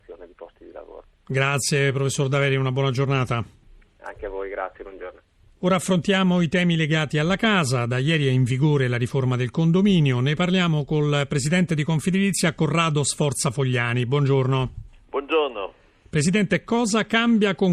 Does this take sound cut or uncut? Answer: uncut